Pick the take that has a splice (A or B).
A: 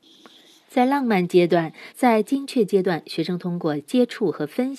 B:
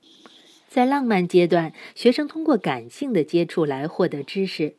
A